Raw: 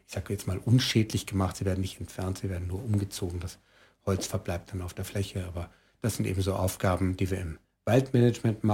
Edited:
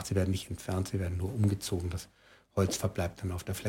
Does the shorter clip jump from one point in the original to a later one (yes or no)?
no